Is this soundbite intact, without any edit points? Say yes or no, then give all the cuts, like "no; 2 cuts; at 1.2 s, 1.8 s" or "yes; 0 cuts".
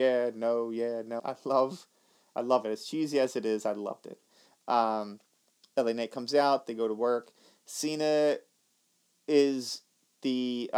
no; 1 cut; at 1.2 s